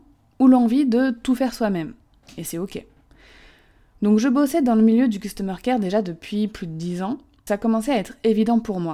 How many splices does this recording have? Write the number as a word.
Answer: one